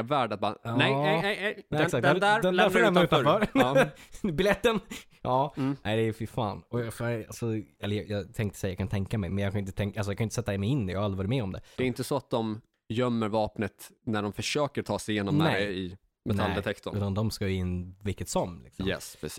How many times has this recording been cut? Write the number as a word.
two